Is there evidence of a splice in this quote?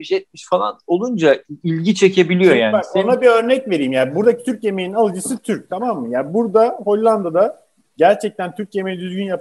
no; 0 cuts

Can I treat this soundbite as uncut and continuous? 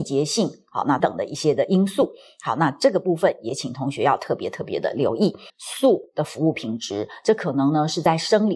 no; 2 cuts; at 1.0 s, 5.5 s

